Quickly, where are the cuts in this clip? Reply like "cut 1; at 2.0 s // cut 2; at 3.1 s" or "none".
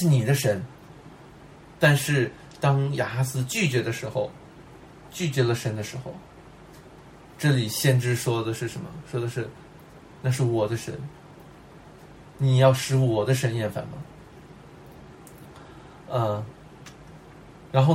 none